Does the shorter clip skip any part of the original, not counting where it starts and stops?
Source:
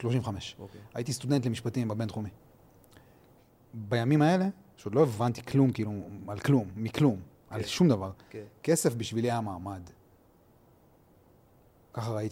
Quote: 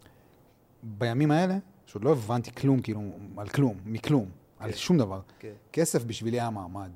no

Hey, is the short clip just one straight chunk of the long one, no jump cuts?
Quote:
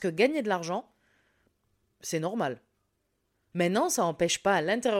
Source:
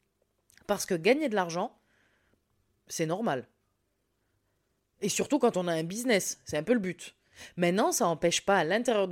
no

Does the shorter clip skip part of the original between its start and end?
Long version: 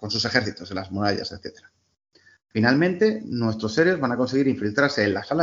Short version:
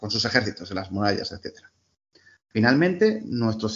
no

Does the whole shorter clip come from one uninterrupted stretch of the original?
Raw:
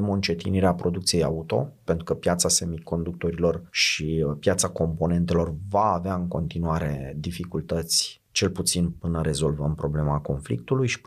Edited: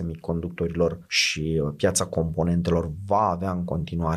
yes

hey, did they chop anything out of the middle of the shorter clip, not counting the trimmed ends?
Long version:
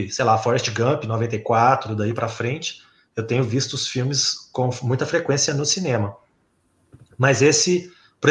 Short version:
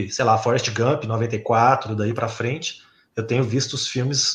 no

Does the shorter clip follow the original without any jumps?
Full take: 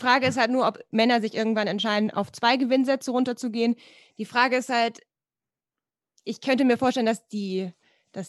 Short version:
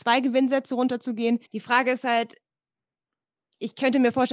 no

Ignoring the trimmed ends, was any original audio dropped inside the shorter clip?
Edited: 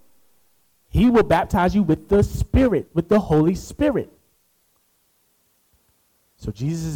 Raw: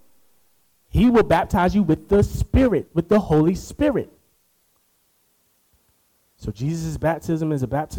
no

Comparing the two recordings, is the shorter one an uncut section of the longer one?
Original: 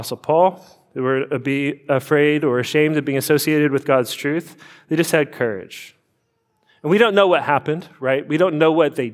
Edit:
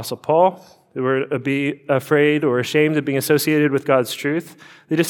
yes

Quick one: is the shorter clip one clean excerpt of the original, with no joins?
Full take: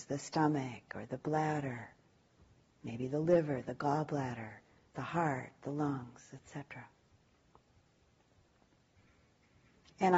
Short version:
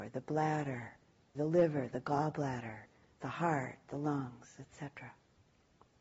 no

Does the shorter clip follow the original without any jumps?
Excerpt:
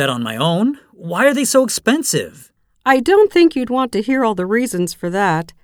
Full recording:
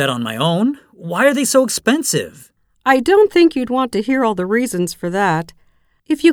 yes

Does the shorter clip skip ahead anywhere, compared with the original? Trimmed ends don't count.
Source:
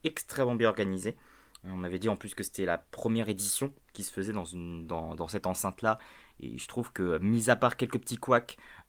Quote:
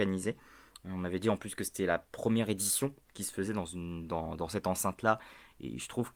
no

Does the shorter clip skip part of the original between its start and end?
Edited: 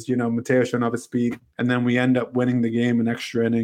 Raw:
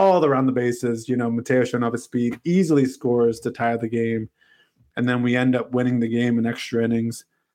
yes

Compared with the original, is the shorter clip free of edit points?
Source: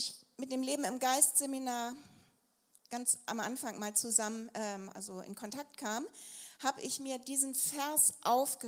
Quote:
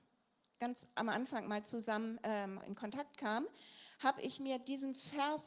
no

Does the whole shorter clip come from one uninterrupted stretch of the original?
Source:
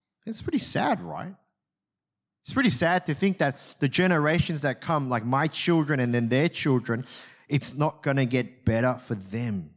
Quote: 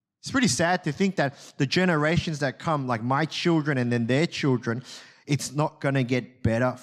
yes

